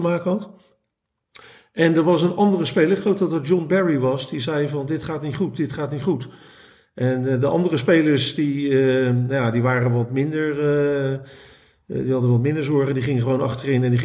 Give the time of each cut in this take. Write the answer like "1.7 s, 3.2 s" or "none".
none

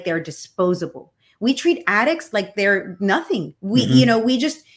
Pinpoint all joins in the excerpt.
3.6 s

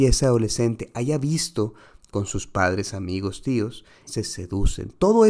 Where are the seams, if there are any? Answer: 4.1 s

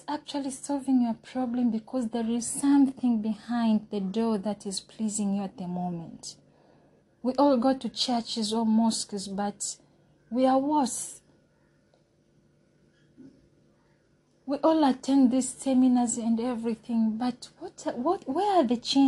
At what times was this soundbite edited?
7.0 s

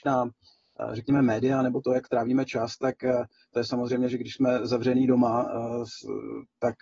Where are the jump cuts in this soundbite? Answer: none

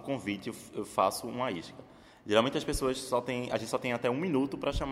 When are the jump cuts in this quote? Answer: none

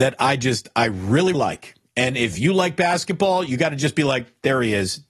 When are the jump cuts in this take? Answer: 1.3 s

